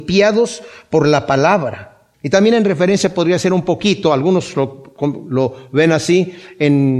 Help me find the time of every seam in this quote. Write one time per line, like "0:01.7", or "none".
0:02.1